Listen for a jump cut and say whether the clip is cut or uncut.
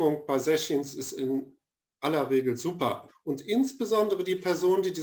cut